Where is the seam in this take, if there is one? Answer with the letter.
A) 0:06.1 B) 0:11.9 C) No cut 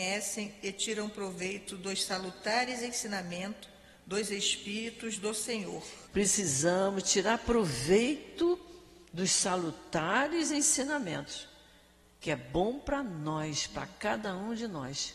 A